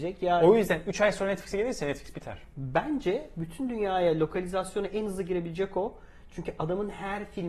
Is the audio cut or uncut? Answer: cut